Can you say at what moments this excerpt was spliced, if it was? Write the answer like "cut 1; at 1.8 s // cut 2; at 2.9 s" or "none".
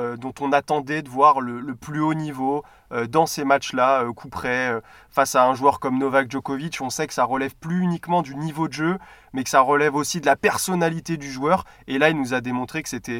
none